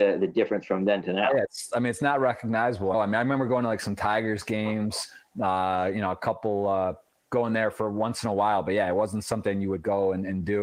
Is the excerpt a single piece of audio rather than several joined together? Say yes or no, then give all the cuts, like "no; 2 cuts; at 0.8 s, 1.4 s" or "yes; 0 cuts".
no; 1 cut; at 2.9 s